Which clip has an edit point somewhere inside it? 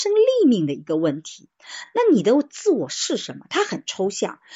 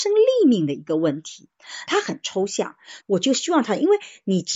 second; 2 cuts; at 1.9 s, 3.0 s

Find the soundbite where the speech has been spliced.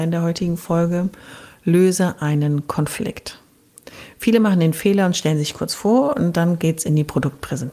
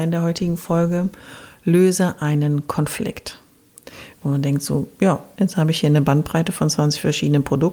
second; 2 cuts; at 4.1 s, 5.3 s

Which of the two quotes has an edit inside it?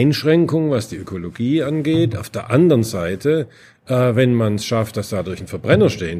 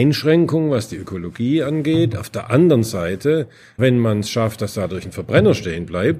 second; 1 cut; at 3.8 s

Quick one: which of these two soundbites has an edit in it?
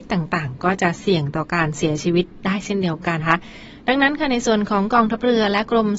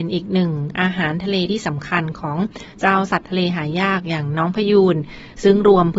first; 1 cut; at 3.2 s

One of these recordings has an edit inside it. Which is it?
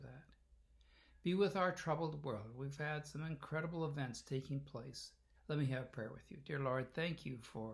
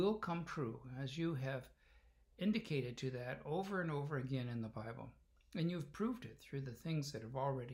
first; 1 cut; at 5.4 s

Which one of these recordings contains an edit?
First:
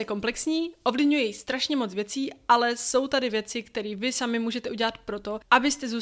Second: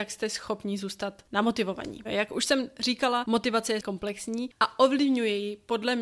second; 1 cut; at 2.0 s

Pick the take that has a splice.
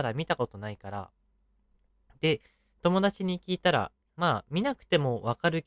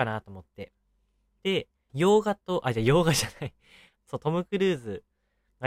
second; 2 cuts; at 1.9 s, 4.0 s

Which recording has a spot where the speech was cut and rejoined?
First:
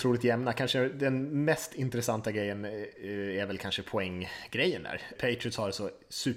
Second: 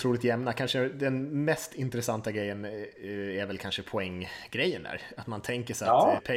first; 1 cut; at 5.2 s

